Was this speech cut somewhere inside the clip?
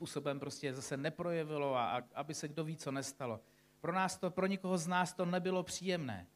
no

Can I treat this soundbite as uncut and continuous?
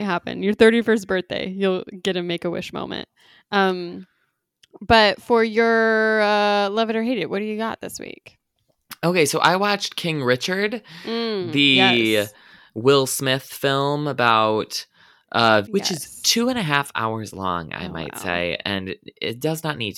no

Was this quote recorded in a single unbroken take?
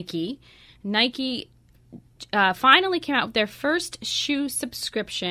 yes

